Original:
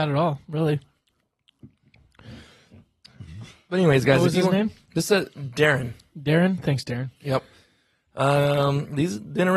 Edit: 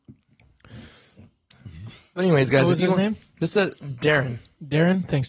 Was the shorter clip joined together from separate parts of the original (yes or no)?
no